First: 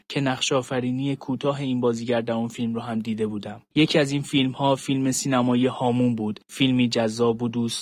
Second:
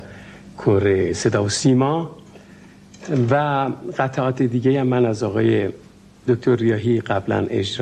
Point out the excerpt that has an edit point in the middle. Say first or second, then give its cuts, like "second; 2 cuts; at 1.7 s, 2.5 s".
first; 1 cut; at 3.7 s